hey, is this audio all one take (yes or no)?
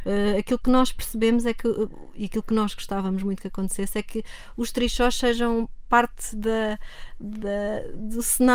yes